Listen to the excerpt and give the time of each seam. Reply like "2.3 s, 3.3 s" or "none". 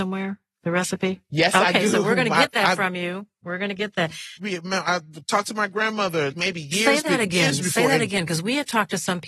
4.4 s, 6.3 s